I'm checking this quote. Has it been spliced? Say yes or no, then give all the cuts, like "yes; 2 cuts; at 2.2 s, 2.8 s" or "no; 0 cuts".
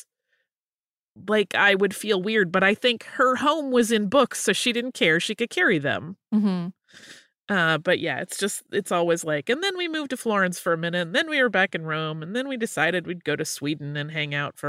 no; 0 cuts